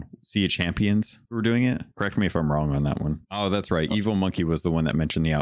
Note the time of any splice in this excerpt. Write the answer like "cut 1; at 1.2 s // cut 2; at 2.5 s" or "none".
none